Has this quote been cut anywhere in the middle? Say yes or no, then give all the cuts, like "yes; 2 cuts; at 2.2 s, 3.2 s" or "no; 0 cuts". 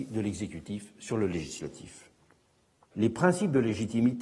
yes; 1 cut; at 2.9 s